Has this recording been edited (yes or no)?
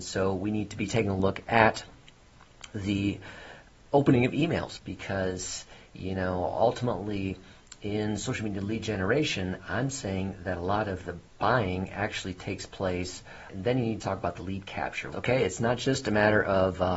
yes